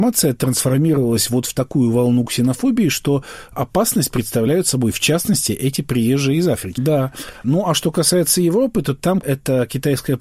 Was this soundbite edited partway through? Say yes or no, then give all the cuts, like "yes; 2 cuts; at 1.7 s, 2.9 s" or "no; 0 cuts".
yes; 1 cut; at 6.8 s